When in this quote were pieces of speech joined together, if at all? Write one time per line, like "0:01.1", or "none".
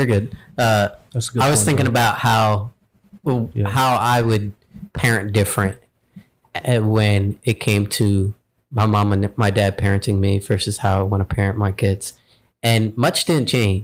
none